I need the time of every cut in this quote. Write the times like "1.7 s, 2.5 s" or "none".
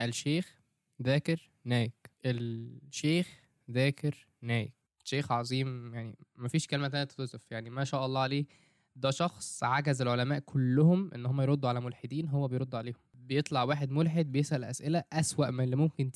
2.2 s